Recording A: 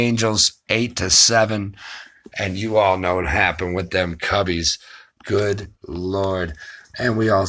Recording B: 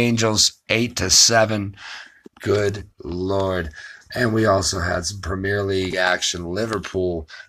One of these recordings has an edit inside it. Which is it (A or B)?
B